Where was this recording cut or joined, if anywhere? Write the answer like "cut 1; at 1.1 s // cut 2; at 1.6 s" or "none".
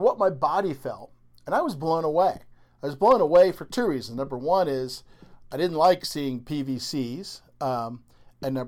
none